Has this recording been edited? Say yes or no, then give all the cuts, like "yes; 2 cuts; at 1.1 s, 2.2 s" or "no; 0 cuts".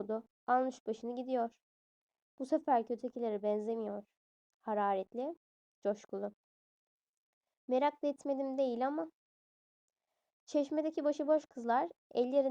no; 0 cuts